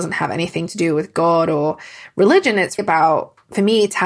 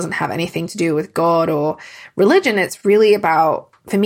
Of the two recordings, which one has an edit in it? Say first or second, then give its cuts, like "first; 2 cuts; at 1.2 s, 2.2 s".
first; 1 cut; at 2.8 s